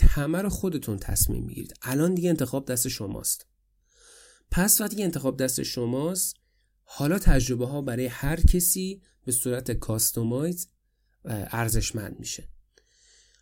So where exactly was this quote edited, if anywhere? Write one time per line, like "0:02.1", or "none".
none